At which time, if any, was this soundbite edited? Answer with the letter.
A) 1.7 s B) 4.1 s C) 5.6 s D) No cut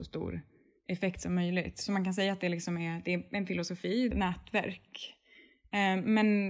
B